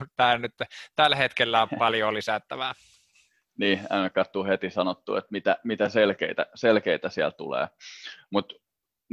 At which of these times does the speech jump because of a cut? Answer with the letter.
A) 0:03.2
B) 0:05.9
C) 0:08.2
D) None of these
D